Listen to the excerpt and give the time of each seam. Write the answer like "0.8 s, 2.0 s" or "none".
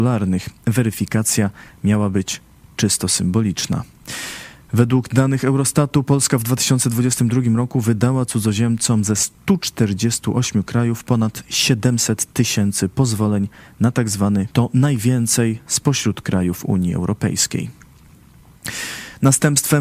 14.5 s